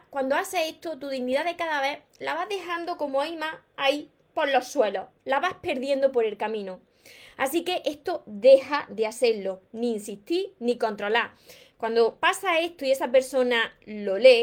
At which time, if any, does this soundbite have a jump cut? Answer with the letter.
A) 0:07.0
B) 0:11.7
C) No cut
B